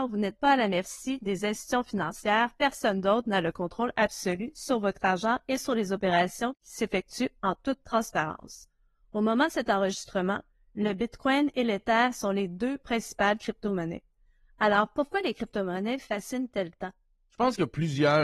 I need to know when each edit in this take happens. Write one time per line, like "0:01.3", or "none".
none